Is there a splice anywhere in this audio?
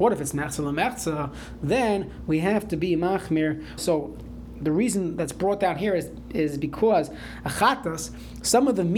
yes; 1 cut; at 3.8 s

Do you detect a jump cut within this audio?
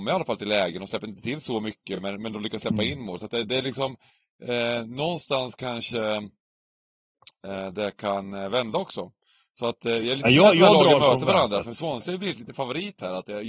no; 0 cuts

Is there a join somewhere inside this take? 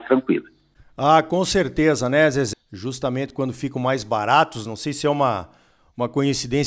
yes; 1 cut; at 2.5 s

